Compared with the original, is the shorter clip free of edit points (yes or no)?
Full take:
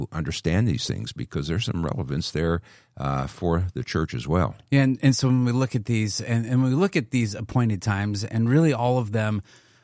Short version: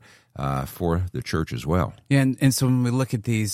yes